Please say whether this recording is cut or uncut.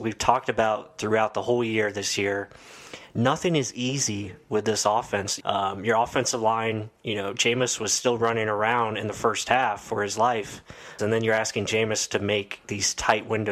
cut